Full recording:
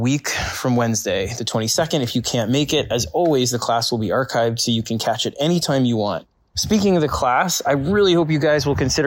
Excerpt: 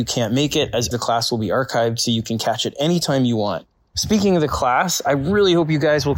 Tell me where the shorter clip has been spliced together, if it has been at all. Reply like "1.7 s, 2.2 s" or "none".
0.9 s